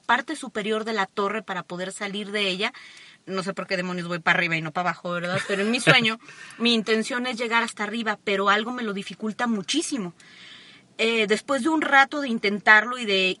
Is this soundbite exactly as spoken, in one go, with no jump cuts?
yes; 0 cuts

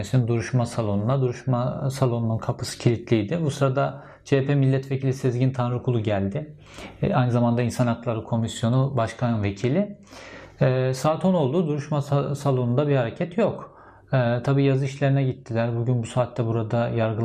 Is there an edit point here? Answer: no; 0 cuts

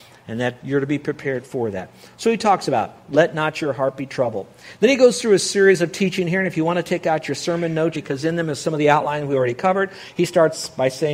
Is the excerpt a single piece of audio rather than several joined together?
no; 1 cut; at 7.9 s

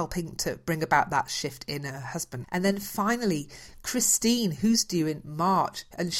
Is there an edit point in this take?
yes; 1 cut; at 2.4 s

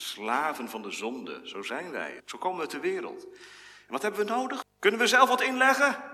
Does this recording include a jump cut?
yes; 2 cuts; at 2.2 s, 4.6 s

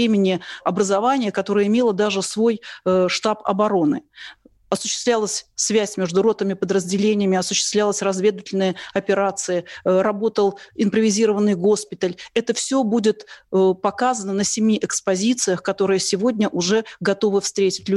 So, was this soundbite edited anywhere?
no; 0 cuts

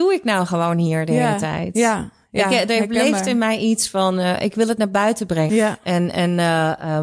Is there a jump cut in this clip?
yes; 1 cut; at 5.5 s

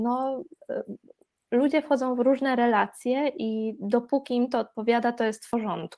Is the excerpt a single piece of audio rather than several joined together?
yes; 0 cuts

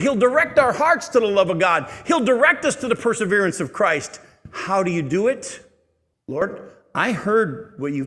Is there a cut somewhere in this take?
yes; 1 cut; at 6.1 s

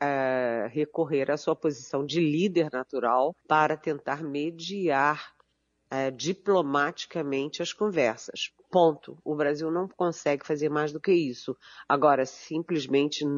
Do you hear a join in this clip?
yes; 1 cut; at 3.4 s

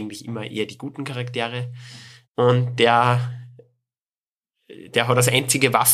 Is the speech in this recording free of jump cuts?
no; 1 cut; at 2.2 s

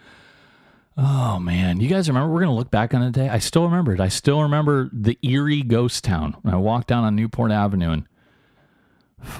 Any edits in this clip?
no; 0 cuts

